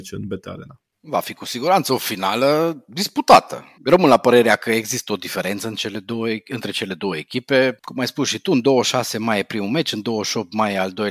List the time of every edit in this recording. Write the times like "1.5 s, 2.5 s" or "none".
3.8 s, 7.8 s